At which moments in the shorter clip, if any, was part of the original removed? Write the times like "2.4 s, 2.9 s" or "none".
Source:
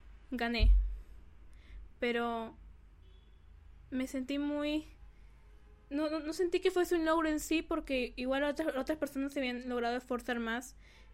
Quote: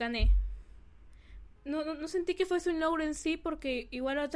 1.6 s